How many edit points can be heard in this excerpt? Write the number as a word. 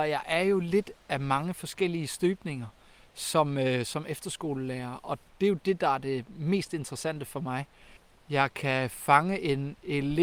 zero